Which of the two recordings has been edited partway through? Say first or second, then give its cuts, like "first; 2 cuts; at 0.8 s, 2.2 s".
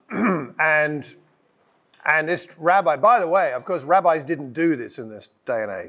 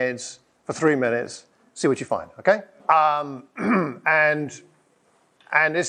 second; 1 cut; at 2.8 s